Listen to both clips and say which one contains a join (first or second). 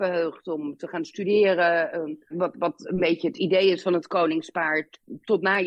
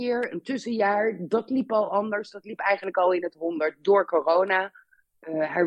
first